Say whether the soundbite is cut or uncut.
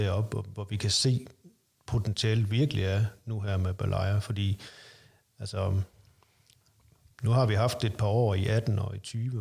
uncut